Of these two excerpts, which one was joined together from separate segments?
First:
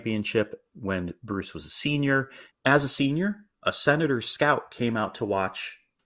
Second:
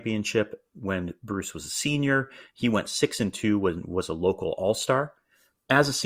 first; 1 cut; at 2.5 s

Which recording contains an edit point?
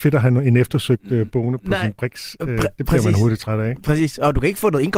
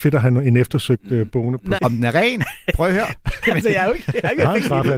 second; 2 cuts; at 1.8 s, 3.4 s

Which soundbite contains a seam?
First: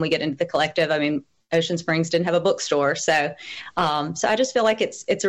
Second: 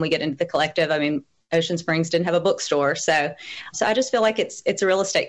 second; 1 cut; at 3.7 s

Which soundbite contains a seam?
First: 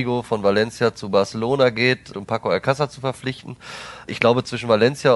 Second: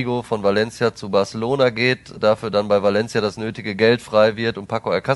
first; 1 cut; at 2.1 s

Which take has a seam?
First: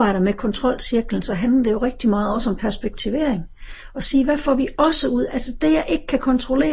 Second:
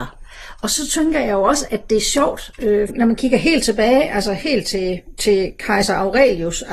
second; 2 cuts; at 1.7 s, 2.9 s

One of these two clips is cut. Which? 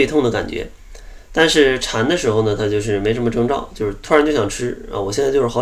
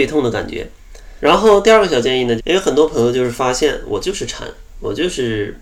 second; 2 cuts; at 1.2 s, 2.4 s

